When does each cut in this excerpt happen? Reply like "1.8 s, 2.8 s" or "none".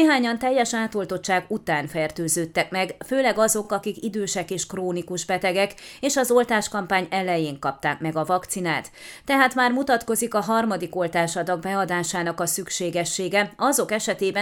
none